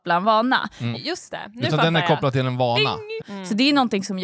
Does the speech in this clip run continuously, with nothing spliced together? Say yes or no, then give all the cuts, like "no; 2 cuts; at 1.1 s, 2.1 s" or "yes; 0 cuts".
no; 2 cuts; at 0.9 s, 3.2 s